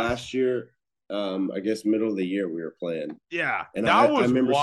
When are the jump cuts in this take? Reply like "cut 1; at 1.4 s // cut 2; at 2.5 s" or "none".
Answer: cut 1; at 3.2 s